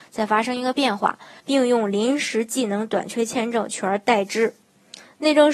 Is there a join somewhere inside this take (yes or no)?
yes